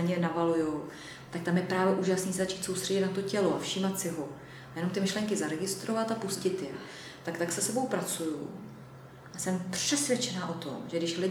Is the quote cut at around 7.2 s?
no; 1 cut; at 9.3 s

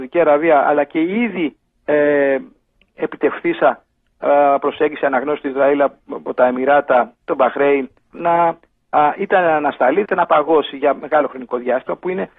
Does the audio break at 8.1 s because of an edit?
yes; 2 cuts; at 8.1 s, 10.0 s

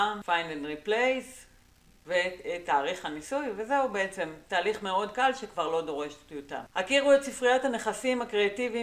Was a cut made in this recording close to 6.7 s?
no; 1 cut; at 2.7 s

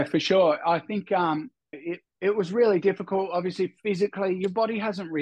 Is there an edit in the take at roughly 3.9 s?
no; 1 cut; at 1.7 s

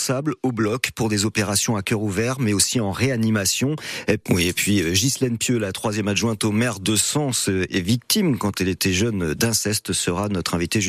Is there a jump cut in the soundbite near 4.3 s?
yes; 1 cut; at 4.3 s

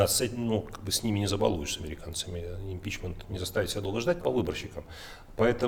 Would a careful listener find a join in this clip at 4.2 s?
yes; 1 cut; at 4.2 s

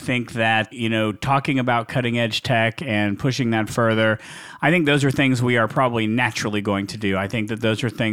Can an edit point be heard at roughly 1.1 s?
no; 0 cuts

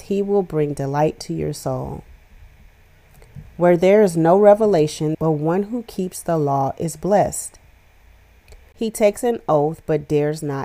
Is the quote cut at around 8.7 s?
yes; 2 cuts; at 5.1 s, 8.7 s

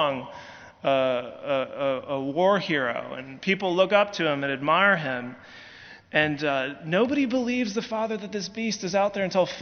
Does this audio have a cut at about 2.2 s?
no; 0 cuts

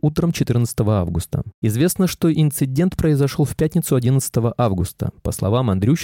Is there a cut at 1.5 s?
yes; 1 cut; at 1.5 s

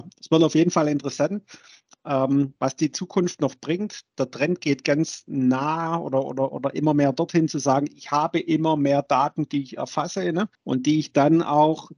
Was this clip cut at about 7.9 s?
no; 1 cut; at 10.5 s

